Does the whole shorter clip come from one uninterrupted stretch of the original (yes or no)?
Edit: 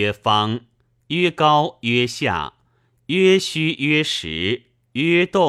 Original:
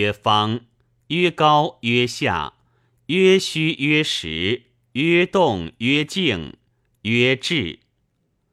yes